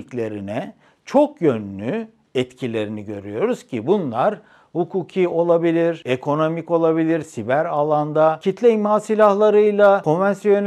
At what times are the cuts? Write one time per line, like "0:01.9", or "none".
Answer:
0:07.2